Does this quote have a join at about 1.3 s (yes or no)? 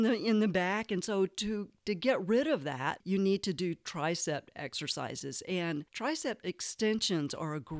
no